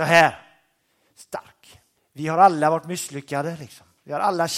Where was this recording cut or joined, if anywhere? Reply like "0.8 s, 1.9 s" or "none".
2.0 s